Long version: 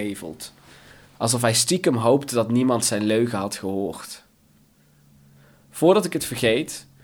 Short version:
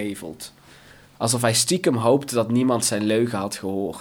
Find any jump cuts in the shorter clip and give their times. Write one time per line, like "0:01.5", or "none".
none